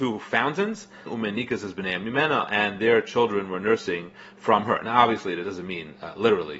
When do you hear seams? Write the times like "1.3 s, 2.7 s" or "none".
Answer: 1.1 s